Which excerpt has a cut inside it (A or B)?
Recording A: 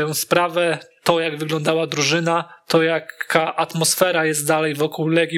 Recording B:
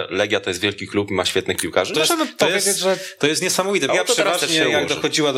B